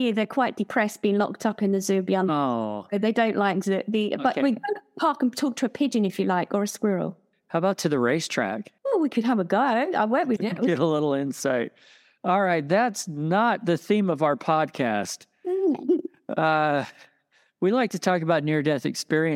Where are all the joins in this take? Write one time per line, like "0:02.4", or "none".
0:08.8
0:10.4